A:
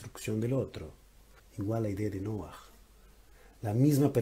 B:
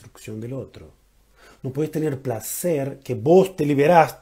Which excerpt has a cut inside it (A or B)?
A